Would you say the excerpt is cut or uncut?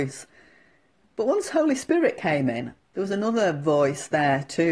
cut